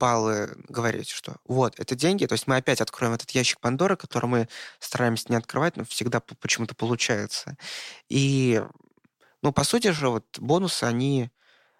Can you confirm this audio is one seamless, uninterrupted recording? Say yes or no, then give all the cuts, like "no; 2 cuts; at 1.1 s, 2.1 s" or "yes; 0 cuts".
yes; 0 cuts